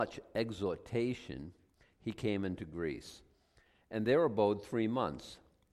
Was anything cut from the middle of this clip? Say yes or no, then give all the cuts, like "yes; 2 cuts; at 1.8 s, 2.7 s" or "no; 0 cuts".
no; 0 cuts